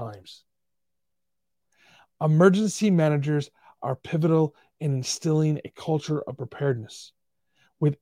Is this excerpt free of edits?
yes; 0 cuts

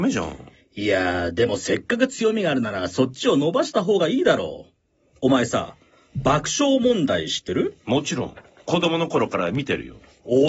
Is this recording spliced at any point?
no; 0 cuts

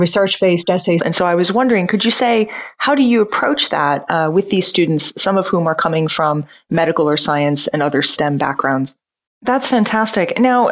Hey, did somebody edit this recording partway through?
yes; 2 cuts; at 1.0 s, 9.3 s

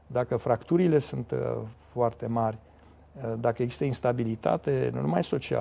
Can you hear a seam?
no; 0 cuts

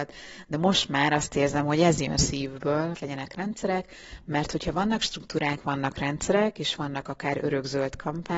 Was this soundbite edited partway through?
yes; 1 cut; at 2.9 s

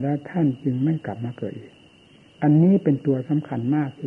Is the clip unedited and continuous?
yes; 0 cuts

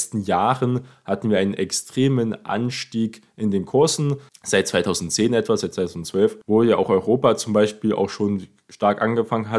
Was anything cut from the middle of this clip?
yes; 2 cuts; at 4.3 s, 6.4 s

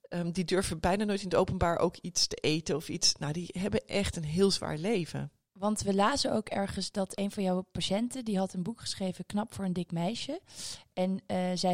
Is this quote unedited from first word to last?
yes; 0 cuts

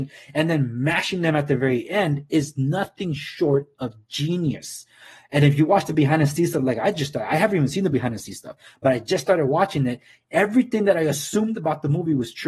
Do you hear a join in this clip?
no; 0 cuts

